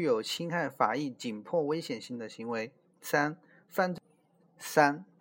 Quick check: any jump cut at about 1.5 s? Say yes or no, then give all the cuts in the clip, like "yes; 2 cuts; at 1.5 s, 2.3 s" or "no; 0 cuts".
no; 1 cut; at 2.9 s